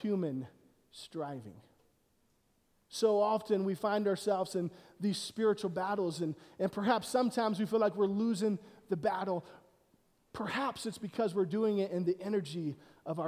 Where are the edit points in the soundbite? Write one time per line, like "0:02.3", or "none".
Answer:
none